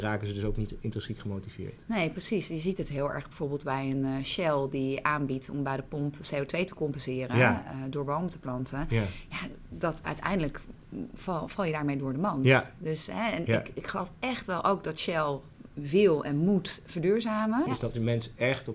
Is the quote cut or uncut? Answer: cut